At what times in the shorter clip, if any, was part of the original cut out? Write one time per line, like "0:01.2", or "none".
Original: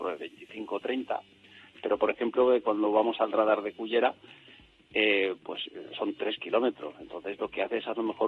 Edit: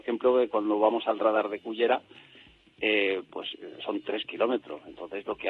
none